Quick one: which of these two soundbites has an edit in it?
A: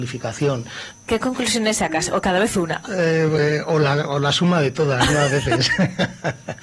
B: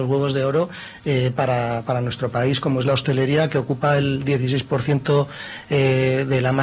A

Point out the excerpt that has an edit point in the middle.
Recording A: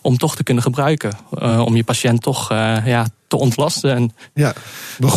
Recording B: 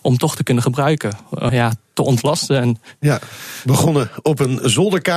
B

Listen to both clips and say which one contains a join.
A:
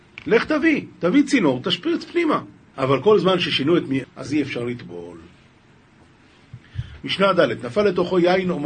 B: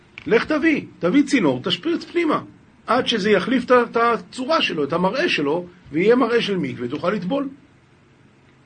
A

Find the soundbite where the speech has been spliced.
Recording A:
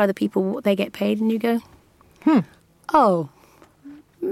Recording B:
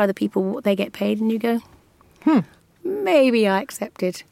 B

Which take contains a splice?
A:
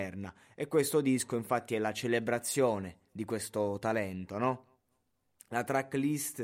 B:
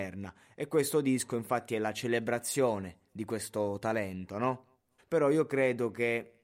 B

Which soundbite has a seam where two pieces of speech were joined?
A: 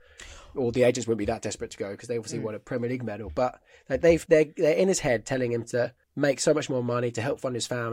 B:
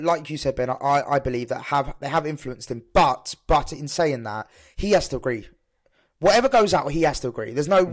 A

